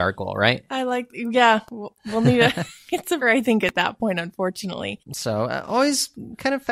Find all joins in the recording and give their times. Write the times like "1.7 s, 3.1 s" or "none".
3.2 s, 5.0 s